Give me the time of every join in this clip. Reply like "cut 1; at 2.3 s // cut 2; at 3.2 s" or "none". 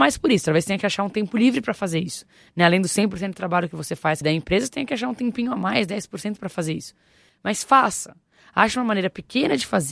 cut 1; at 4.2 s